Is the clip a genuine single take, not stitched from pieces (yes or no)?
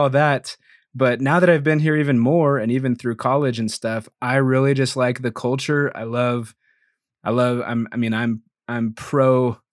yes